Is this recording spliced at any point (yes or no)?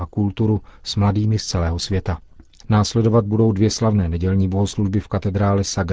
yes